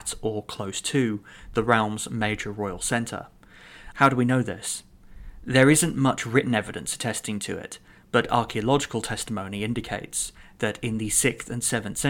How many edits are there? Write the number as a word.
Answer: one